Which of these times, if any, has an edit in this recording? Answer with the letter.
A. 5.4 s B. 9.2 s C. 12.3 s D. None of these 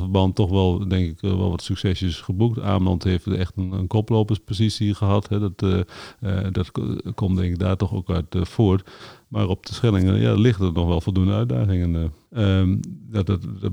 C